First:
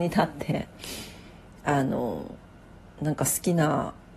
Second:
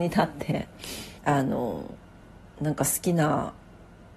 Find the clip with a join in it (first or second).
second